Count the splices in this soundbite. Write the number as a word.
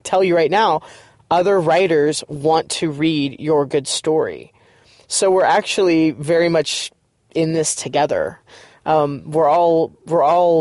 zero